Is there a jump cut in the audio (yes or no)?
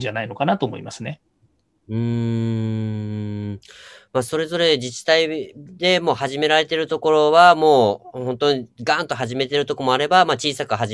no